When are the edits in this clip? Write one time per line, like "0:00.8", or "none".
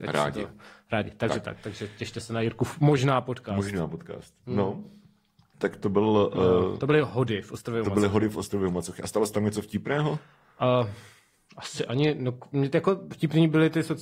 0:05.5